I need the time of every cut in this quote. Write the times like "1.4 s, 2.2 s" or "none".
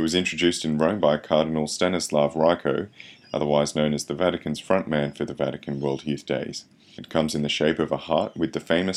3.2 s, 7.0 s